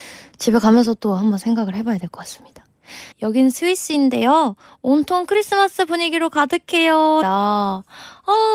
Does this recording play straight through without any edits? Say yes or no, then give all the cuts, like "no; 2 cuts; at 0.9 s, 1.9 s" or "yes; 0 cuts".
no; 2 cuts; at 3.1 s, 7.2 s